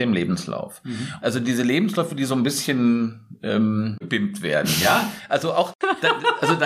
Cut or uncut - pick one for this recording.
cut